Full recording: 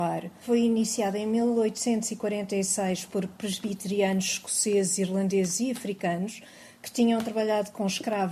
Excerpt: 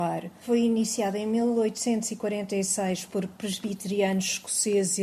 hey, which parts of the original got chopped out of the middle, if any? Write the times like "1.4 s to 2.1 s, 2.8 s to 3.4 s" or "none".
none